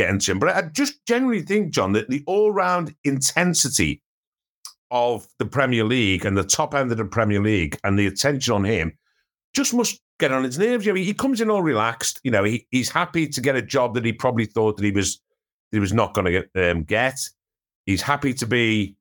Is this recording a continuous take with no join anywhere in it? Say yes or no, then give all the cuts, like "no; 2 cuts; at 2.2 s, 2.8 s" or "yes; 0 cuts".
yes; 0 cuts